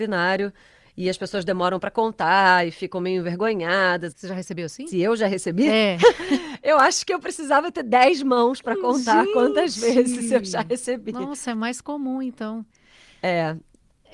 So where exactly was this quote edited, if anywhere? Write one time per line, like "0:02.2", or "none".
0:04.1